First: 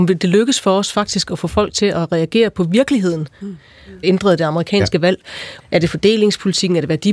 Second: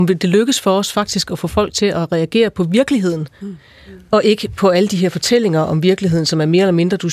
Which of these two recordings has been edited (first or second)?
first